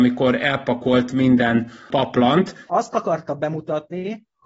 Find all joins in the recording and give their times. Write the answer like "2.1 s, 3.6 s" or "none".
2.7 s